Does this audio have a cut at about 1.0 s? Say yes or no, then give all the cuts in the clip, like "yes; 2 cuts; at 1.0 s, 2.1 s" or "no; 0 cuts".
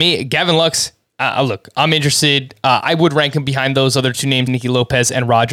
no; 1 cut; at 4.5 s